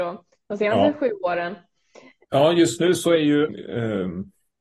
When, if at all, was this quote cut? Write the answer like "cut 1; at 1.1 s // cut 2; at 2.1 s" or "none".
cut 1; at 2.2 s // cut 2; at 3.5 s